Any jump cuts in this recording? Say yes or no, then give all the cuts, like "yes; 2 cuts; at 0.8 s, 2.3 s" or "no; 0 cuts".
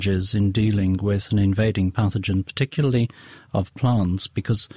no; 0 cuts